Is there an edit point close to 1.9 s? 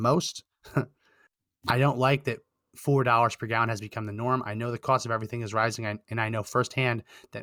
no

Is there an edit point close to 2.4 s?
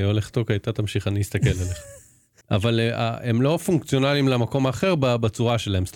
yes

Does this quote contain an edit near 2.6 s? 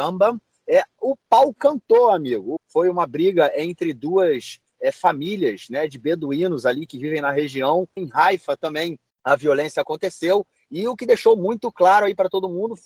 yes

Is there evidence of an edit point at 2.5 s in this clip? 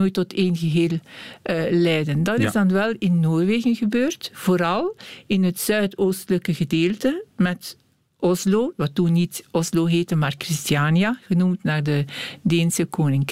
no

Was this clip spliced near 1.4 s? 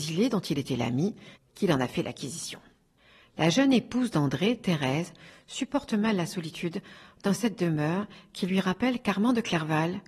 yes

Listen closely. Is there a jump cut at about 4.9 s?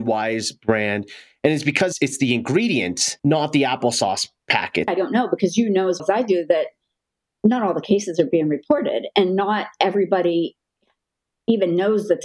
yes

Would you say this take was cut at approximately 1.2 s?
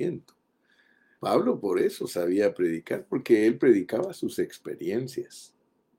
yes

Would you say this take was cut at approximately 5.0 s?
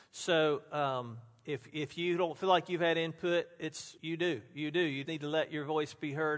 yes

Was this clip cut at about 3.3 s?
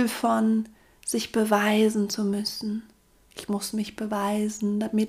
yes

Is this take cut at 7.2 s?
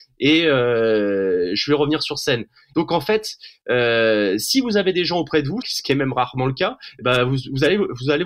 no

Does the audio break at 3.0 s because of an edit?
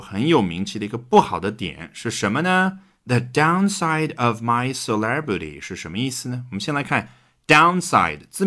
yes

